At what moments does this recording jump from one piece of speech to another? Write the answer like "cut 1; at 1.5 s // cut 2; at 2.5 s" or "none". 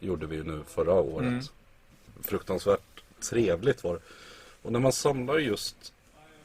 none